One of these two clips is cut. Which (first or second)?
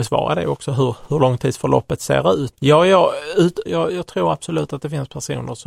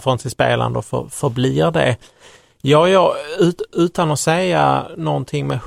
first